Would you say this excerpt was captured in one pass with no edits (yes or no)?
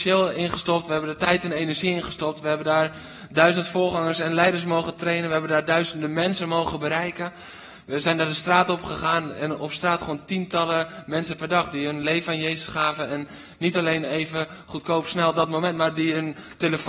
yes